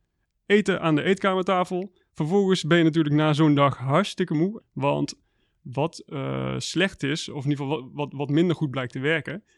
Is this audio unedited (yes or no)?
no